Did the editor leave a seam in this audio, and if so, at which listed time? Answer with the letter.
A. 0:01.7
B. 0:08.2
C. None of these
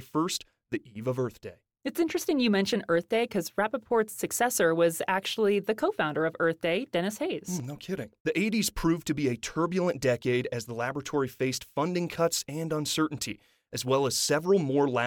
B